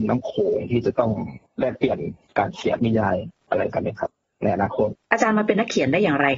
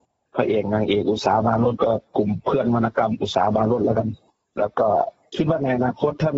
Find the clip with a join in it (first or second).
first